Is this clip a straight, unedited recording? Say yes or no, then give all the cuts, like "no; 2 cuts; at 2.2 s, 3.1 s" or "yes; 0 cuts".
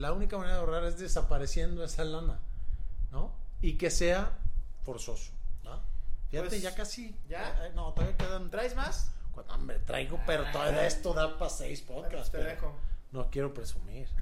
yes; 0 cuts